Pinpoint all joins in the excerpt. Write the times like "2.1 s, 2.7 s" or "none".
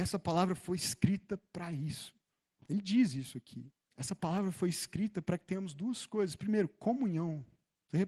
3.8 s